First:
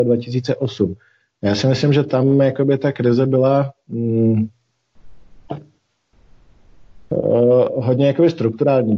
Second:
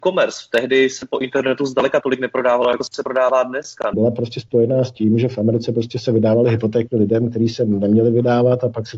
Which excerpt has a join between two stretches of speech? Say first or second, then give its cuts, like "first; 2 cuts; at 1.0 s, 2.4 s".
second; 1 cut; at 3.9 s